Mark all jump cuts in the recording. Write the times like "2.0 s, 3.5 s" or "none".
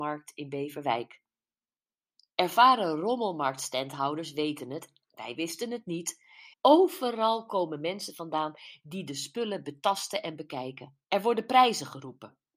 6.5 s, 11.0 s